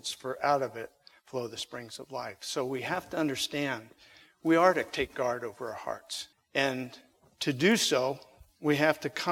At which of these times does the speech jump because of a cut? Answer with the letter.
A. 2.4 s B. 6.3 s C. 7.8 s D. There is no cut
B